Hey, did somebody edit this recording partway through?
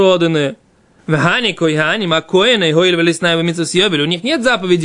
yes; 1 cut; at 1.0 s

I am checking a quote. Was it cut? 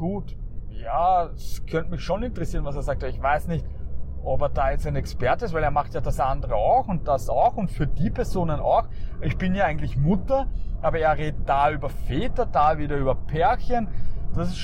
no; 0 cuts

